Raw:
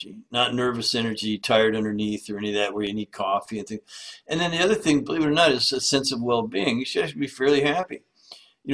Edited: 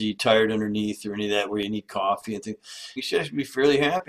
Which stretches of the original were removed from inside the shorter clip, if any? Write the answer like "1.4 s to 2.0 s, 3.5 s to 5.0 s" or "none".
4.2 s to 6.8 s